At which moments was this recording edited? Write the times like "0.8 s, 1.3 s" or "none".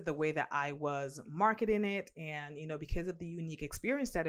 none